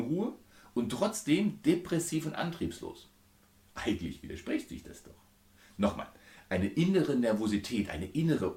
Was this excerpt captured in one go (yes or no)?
yes